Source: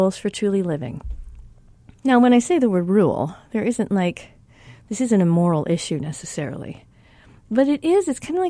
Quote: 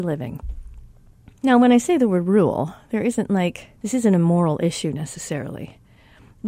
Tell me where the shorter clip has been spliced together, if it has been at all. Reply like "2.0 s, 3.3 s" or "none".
3.8 s

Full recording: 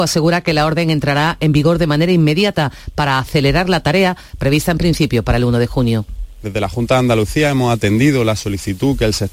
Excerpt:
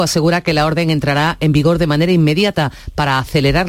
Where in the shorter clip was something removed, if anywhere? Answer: none

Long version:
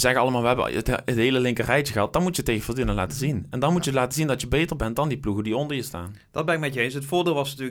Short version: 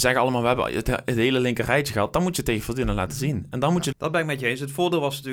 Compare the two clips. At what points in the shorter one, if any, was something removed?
3.9 s

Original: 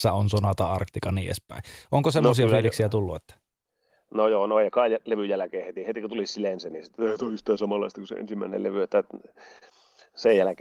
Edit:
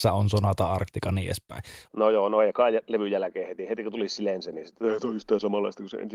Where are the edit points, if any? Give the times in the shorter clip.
1.9 s

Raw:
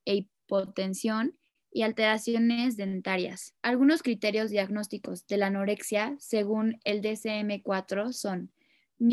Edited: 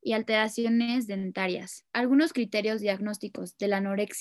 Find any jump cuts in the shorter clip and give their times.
none

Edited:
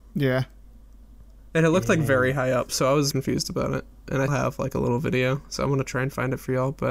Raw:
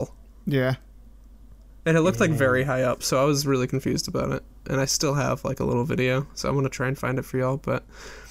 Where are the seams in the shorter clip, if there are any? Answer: 3.1 s, 4.3 s

